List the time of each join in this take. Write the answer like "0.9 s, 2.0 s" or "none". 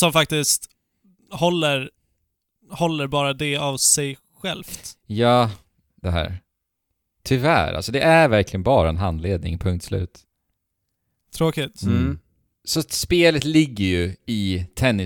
5.9 s